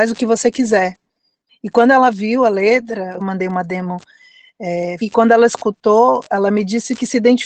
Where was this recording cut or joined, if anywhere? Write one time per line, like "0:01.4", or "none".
0:01.5
0:03.2
0:05.0